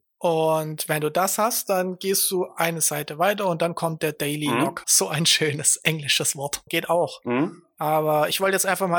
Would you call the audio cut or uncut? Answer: cut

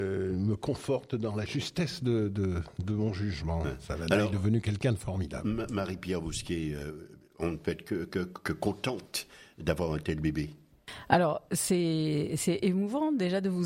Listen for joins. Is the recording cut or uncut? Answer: uncut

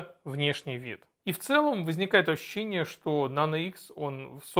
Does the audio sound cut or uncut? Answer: cut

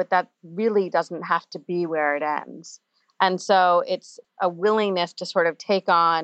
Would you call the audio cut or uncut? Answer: uncut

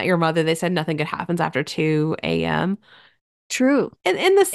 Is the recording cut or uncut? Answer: uncut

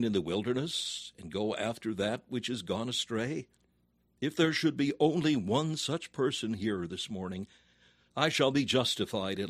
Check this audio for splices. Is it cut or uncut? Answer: cut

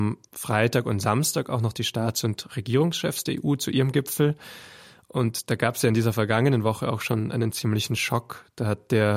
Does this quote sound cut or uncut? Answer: uncut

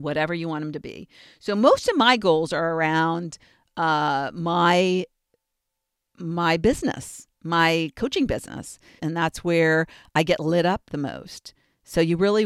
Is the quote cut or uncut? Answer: cut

